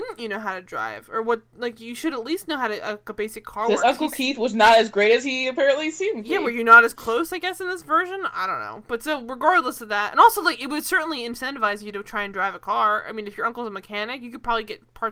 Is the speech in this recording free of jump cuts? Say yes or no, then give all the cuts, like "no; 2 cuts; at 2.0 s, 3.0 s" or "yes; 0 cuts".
yes; 0 cuts